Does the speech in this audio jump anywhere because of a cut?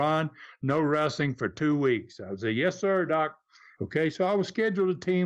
yes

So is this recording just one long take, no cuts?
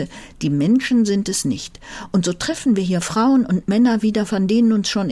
yes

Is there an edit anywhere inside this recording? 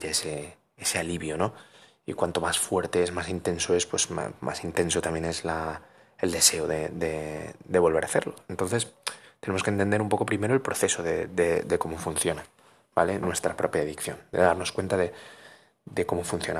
no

